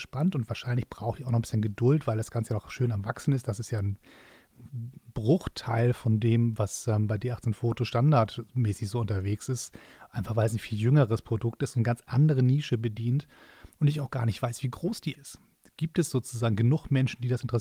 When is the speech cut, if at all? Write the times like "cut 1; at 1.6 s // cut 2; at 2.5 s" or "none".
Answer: cut 1; at 15.1 s